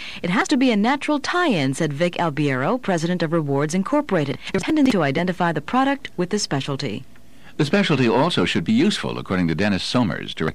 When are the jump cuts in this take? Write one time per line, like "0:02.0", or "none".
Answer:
none